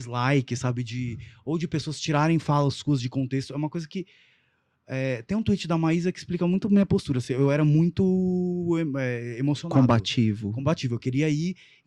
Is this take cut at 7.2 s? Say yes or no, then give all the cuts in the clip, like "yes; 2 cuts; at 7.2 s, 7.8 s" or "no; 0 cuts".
no; 0 cuts